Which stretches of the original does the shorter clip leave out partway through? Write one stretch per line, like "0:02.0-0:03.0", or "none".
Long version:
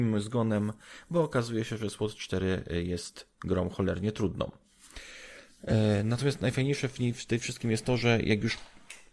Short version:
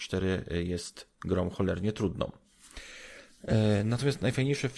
none